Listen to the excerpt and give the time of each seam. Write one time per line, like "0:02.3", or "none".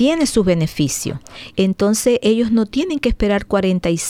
0:01.5